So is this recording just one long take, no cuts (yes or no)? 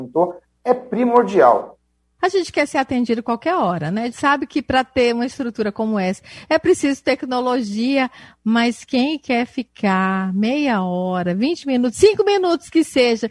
no